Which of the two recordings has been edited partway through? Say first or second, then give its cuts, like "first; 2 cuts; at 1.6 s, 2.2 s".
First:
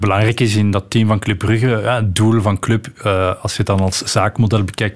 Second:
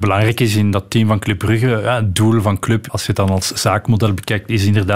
second; 1 cut; at 2.9 s